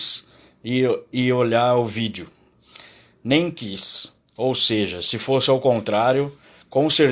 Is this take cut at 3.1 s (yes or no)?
no